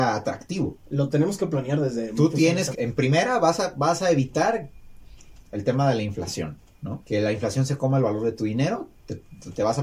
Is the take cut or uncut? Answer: cut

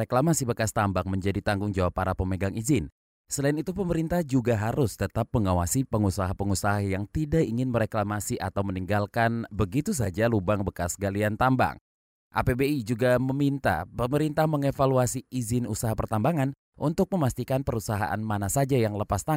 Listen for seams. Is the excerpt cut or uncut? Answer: uncut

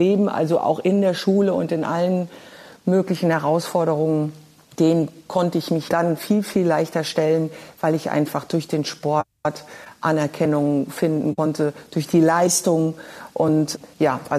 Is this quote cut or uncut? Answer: uncut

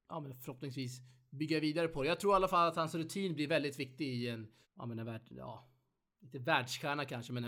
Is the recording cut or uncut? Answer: cut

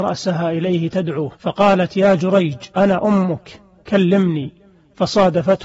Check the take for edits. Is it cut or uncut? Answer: cut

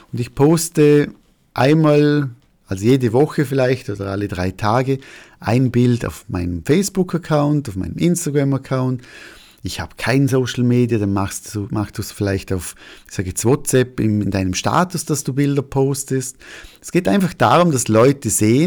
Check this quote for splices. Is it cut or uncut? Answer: uncut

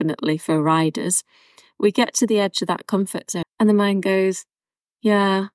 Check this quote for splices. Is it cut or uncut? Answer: cut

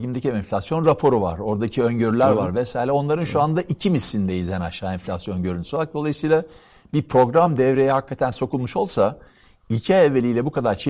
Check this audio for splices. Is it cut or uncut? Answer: uncut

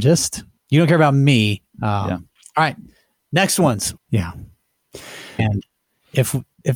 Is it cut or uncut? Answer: cut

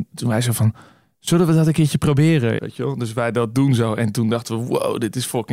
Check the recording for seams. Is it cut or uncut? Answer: cut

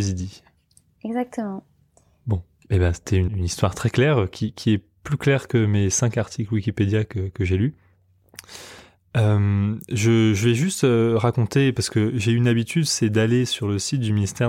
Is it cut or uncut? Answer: cut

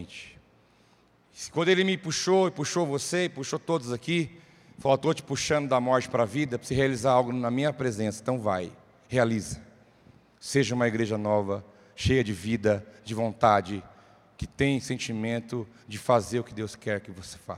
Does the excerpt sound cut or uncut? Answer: uncut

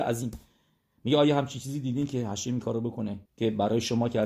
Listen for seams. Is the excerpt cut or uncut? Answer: cut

